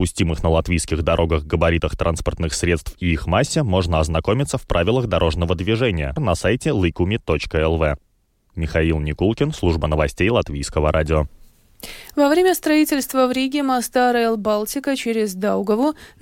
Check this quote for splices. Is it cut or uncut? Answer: cut